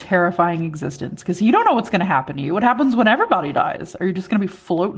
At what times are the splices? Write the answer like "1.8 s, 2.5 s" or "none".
none